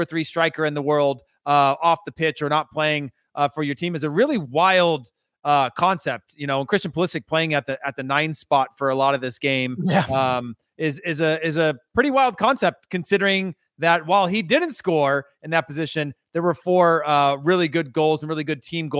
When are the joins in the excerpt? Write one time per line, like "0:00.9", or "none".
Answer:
none